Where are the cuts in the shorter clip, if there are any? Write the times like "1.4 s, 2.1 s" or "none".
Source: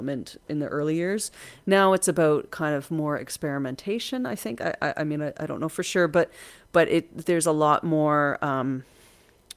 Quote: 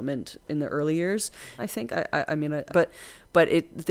1.6 s, 2.7 s